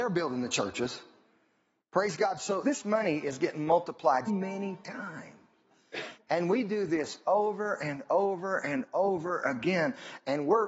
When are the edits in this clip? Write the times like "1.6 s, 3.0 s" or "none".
2.6 s, 4.3 s